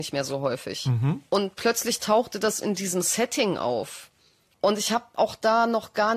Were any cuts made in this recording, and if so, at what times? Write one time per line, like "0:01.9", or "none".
0:04.5